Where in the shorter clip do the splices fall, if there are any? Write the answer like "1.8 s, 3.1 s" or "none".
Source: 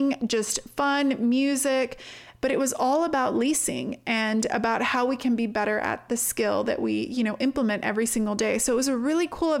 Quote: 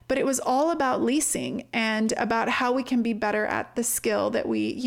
none